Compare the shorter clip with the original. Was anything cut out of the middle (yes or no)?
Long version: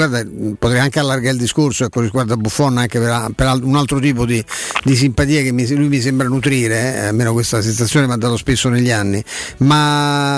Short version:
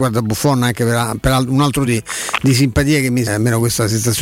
yes